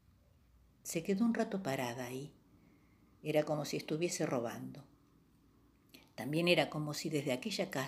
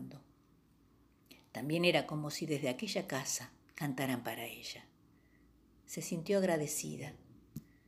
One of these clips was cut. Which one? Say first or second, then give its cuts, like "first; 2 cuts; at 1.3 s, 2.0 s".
second; 1 cut; at 3.6 s